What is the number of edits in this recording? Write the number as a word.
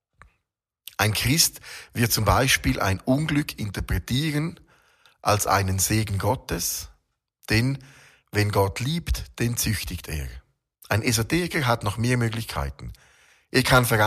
one